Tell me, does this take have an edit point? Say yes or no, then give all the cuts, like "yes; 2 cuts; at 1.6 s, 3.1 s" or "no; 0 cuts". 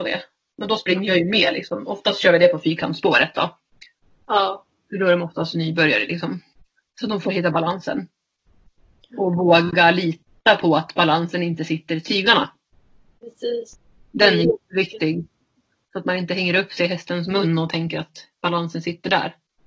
no; 0 cuts